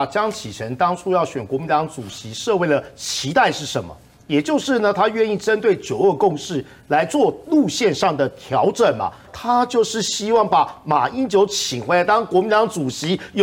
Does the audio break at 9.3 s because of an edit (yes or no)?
yes